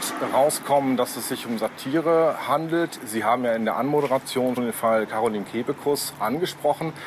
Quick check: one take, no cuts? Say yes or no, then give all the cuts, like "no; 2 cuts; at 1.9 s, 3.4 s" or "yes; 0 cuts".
no; 1 cut; at 4.6 s